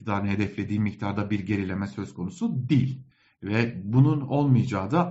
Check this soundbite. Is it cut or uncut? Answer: uncut